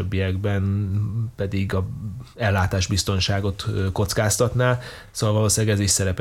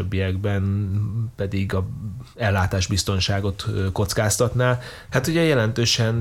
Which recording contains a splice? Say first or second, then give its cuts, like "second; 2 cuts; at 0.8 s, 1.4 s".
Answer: second; 1 cut; at 5.1 s